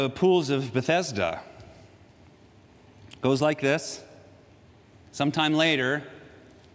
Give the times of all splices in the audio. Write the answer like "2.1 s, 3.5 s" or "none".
none